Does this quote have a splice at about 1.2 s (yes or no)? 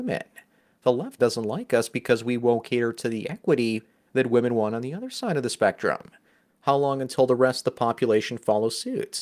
yes